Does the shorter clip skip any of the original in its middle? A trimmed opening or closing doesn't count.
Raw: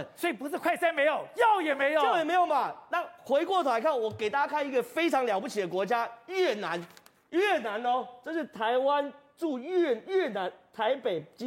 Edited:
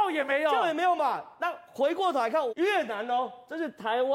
yes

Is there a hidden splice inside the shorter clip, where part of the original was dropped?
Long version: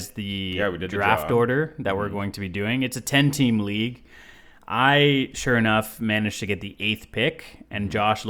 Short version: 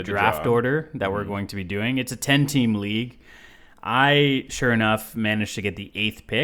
no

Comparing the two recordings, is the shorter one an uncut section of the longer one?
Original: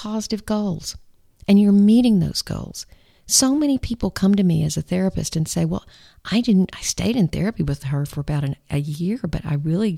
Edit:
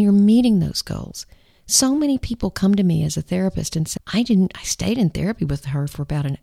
no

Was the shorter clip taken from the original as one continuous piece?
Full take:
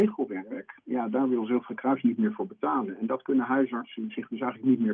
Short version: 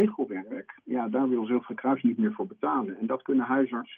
yes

